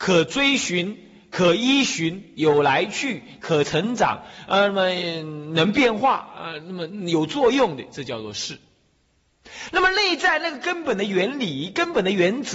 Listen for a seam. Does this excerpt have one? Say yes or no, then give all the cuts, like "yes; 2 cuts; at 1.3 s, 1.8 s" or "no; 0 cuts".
no; 0 cuts